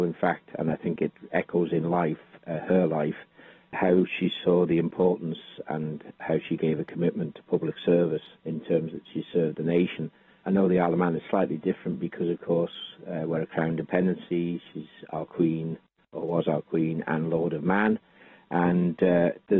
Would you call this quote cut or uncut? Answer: uncut